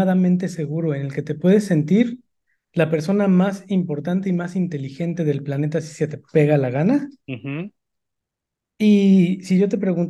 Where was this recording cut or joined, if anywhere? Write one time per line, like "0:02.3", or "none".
none